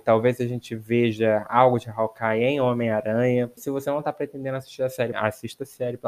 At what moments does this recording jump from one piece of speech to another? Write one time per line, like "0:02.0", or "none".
0:03.6
0:05.1